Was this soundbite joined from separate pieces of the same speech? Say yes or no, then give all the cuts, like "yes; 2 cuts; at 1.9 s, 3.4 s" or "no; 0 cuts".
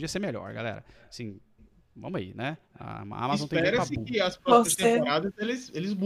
no; 0 cuts